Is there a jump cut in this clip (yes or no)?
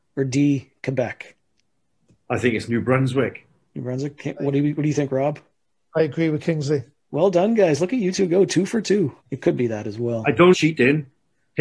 yes